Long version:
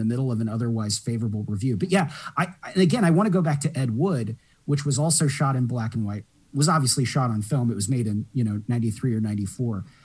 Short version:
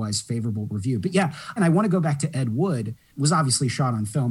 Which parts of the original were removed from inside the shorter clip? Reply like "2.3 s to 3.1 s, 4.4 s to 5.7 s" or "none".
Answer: 2.3 s to 3.0 s, 4.5 s to 6.5 s